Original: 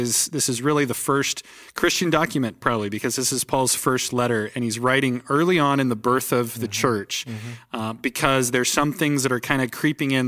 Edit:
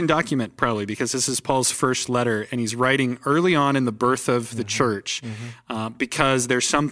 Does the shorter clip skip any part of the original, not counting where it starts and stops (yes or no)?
no